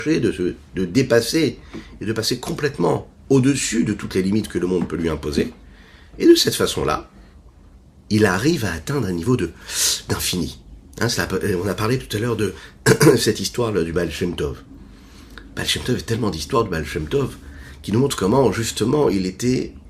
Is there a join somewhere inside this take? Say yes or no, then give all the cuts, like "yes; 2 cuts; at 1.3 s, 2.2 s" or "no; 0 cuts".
no; 0 cuts